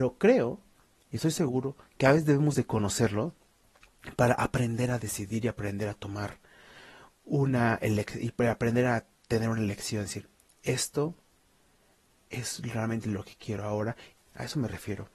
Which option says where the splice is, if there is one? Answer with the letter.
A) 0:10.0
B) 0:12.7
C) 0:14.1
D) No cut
C